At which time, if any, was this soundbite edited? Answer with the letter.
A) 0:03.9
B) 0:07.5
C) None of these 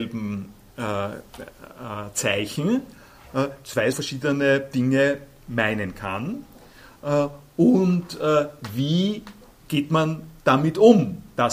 A